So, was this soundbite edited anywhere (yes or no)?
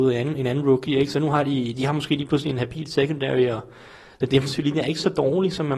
no